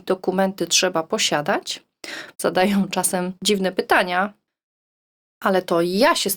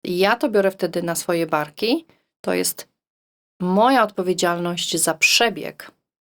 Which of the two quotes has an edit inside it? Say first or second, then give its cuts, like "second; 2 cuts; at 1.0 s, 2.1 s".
first; 2 cuts; at 2.3 s, 3.4 s